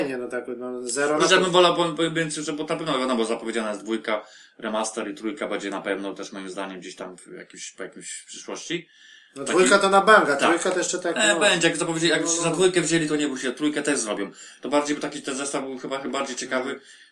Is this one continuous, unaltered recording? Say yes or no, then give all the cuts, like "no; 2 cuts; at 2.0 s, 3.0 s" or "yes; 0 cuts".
yes; 0 cuts